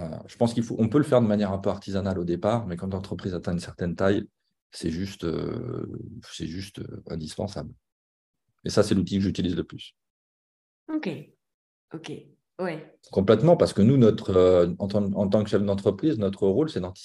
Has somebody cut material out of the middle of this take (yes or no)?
yes